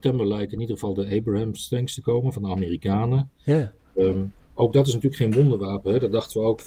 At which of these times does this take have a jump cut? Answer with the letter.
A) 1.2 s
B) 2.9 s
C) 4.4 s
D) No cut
C